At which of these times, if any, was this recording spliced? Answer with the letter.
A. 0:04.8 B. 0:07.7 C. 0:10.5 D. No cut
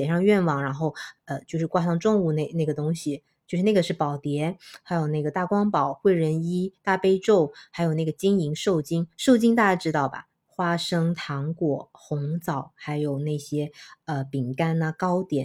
C